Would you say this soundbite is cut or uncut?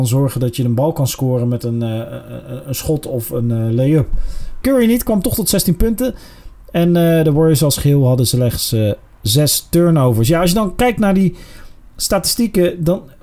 cut